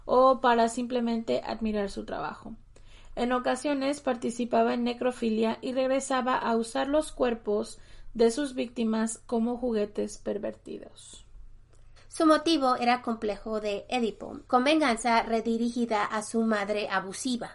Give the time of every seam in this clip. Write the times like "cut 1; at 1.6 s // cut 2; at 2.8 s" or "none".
cut 1; at 12.0 s // cut 2; at 14.5 s